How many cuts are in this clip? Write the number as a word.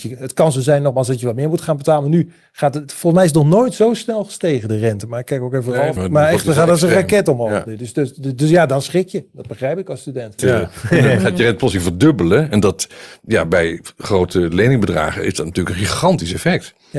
two